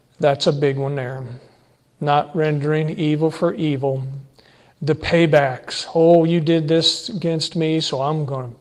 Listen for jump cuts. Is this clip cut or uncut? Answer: uncut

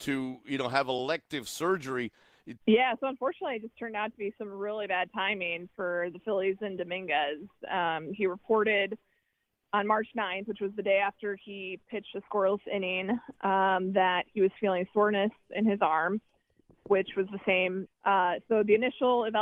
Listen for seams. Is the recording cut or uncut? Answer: cut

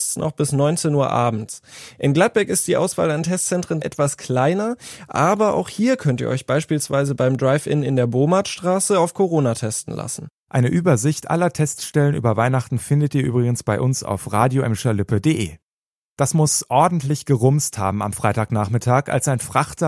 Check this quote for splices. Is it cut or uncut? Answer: uncut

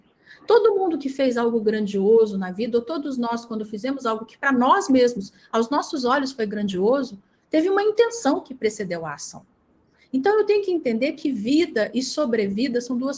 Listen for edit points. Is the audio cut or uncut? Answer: uncut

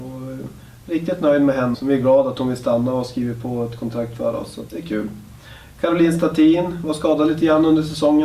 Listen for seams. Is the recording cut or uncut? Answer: cut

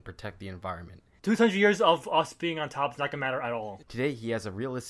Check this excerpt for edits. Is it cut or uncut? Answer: cut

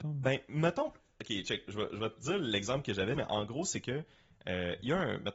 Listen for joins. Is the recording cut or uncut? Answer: cut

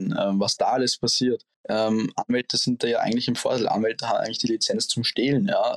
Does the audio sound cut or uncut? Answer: cut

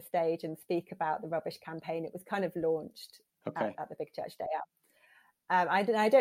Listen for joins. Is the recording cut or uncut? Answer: cut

